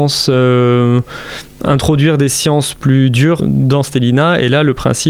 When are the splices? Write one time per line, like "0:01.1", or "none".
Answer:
0:03.4